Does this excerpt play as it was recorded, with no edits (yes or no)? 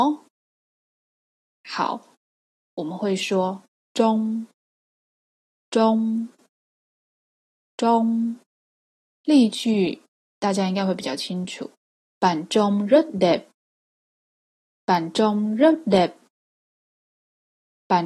no